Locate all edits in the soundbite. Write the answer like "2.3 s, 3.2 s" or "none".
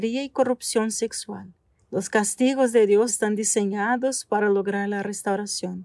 1.8 s, 3.1 s